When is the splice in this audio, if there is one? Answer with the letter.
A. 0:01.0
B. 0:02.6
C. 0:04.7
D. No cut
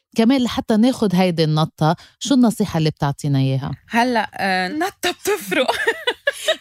C